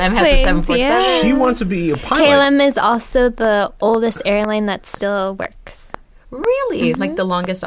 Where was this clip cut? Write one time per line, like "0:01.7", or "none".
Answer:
none